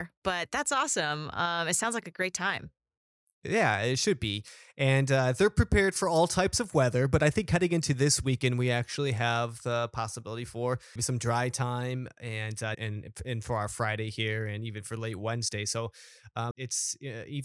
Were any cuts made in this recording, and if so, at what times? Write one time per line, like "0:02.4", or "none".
0:11.0
0:12.7
0:16.5